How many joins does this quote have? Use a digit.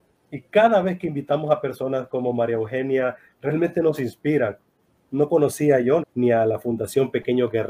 1